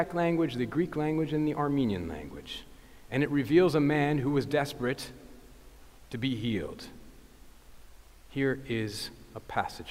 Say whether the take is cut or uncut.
uncut